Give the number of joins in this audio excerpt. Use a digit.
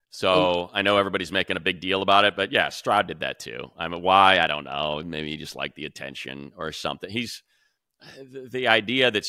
0